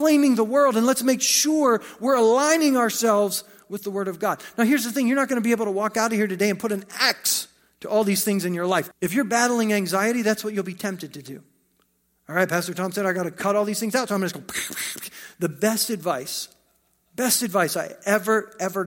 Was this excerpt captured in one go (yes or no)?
no